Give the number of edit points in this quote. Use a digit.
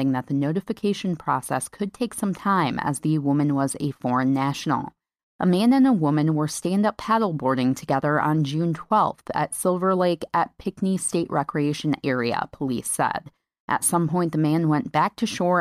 1